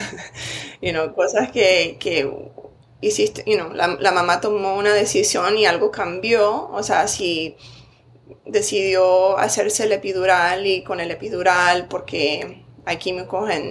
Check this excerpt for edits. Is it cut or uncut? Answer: uncut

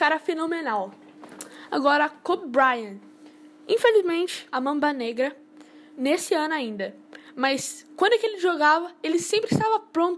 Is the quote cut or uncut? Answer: cut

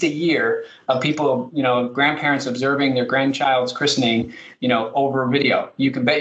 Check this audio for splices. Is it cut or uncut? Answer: uncut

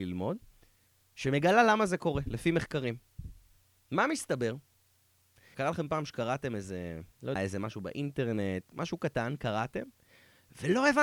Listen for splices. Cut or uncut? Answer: cut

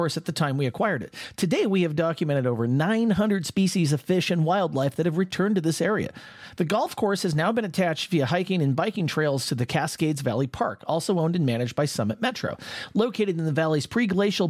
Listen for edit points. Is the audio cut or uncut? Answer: uncut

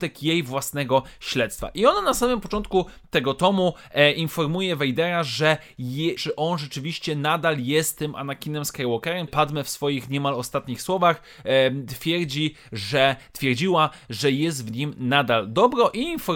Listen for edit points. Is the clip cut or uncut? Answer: cut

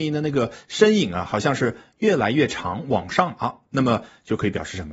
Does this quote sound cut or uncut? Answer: uncut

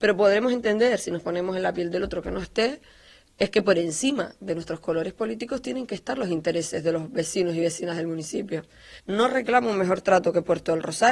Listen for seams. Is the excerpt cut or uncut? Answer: cut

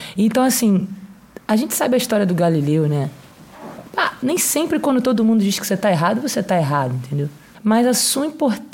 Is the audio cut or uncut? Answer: cut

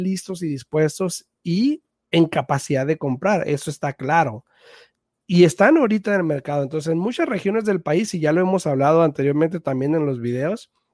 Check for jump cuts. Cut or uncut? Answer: uncut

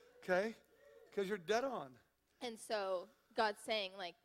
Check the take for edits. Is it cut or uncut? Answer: uncut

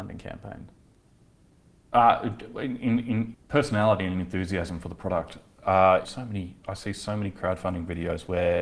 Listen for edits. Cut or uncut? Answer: cut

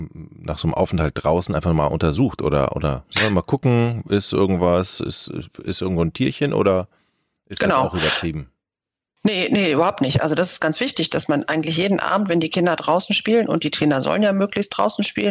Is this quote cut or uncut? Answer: uncut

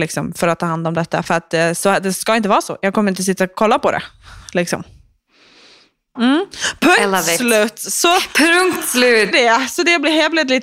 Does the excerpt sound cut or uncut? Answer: cut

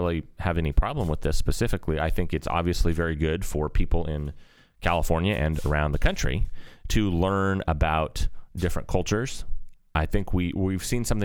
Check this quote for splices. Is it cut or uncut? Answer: uncut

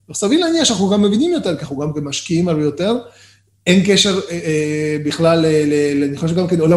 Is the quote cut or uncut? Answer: uncut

